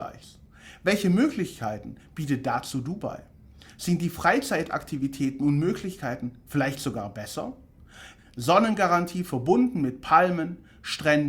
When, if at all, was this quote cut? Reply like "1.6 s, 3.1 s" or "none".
8.2 s

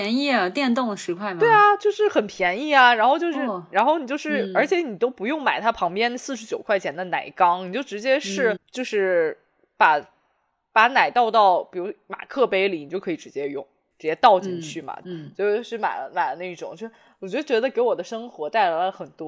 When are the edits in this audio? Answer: 8.6 s, 13.9 s, 15.0 s

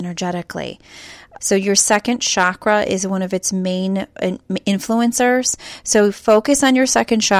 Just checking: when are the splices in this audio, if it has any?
1.4 s

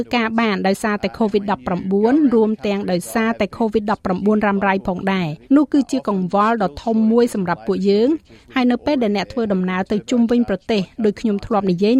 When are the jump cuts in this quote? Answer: 5.4 s

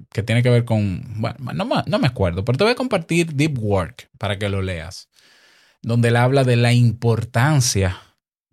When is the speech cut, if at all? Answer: none

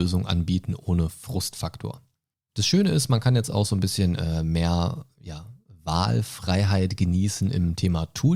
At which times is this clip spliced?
none

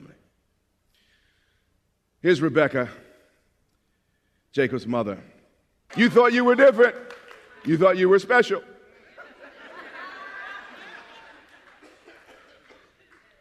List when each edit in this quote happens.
5.9 s

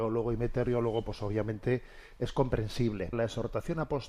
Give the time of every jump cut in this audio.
3.1 s

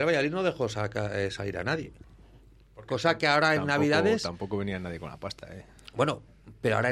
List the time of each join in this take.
none

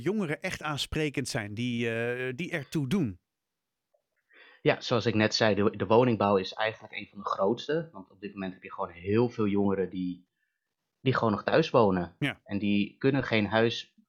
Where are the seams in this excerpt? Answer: none

